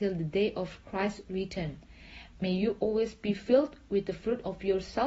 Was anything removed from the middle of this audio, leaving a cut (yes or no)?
no